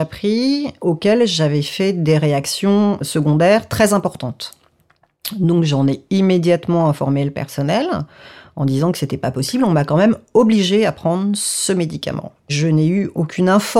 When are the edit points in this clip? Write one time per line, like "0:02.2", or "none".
none